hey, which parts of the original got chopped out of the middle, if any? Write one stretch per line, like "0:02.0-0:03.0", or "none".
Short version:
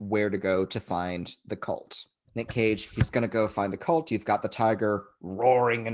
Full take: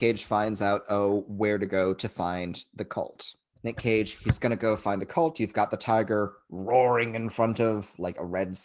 none